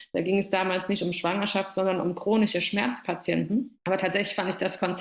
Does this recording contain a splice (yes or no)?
yes